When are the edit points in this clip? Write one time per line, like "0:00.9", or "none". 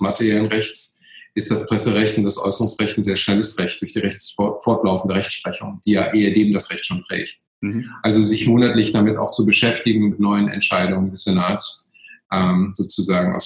none